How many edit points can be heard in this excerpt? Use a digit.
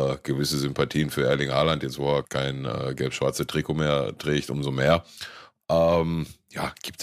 2